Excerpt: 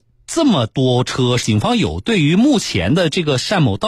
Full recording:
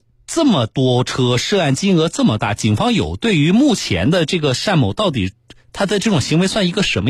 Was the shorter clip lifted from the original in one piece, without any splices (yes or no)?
no